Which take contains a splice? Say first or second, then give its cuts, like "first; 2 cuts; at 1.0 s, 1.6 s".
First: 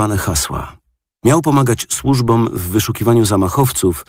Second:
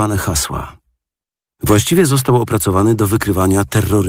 first; 1 cut; at 1.1 s